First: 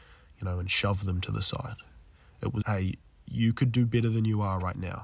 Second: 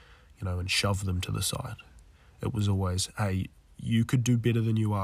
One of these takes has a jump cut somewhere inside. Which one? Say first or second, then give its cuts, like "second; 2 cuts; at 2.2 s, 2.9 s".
first; 1 cut; at 2.6 s